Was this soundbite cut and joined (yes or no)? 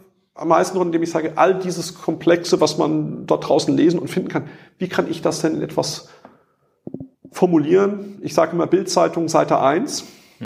no